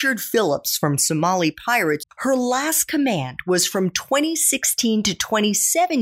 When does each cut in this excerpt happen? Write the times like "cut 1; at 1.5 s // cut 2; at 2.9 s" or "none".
cut 1; at 2.0 s

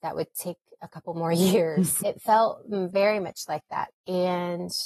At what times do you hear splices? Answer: cut 1; at 2.0 s // cut 2; at 3.9 s

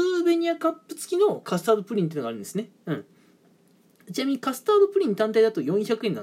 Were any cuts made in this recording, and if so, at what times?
none

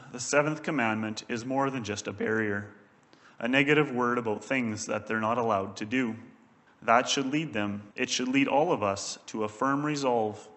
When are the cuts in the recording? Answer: cut 1; at 6.7 s // cut 2; at 7.9 s

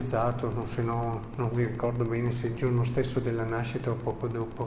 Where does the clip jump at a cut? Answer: none

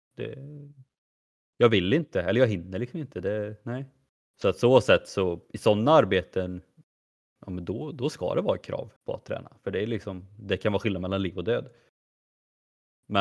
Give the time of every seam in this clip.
cut 1; at 4.2 s // cut 2; at 9.0 s

